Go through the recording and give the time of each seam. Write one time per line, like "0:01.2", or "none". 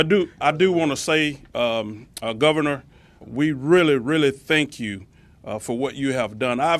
none

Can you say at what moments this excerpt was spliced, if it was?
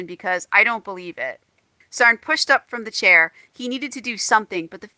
none

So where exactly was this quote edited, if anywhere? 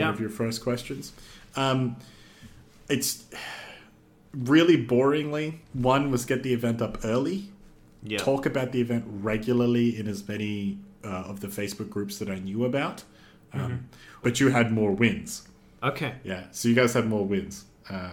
0:14.2
0:15.8

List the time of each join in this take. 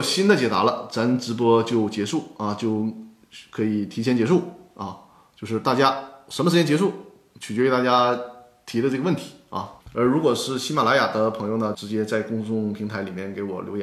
0:09.8
0:11.7

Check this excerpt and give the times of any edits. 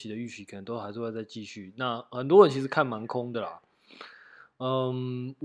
none

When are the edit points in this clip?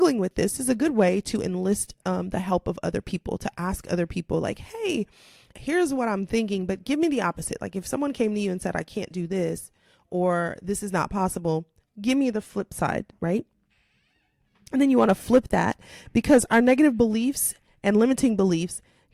0:05.5

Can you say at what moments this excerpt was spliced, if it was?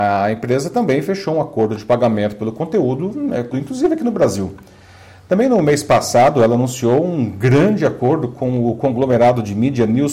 0:03.5

